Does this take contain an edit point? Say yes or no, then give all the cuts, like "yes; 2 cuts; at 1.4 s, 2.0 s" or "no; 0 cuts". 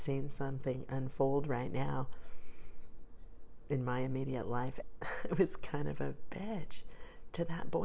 yes; 1 cut; at 4.8 s